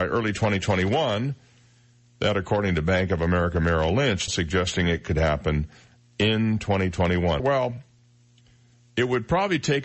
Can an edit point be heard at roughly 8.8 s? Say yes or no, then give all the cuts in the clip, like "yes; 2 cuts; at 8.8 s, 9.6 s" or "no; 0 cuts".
no; 2 cuts; at 4.3 s, 7.4 s